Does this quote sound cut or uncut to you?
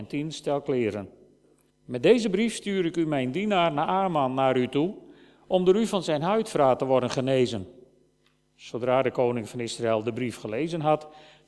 cut